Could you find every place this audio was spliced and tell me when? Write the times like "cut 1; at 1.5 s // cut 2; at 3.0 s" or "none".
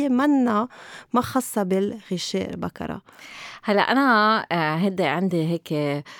none